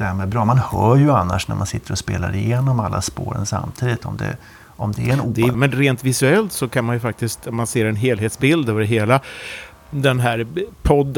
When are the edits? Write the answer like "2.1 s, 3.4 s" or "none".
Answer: 5.5 s